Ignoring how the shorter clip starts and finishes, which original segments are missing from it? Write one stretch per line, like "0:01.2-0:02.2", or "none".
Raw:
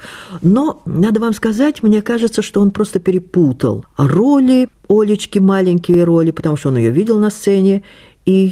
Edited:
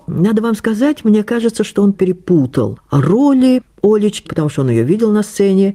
0:02.7-0:03.0
0:05.3-0:06.3